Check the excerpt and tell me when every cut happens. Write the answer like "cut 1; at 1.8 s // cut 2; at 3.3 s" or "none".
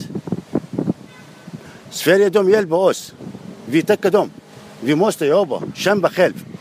none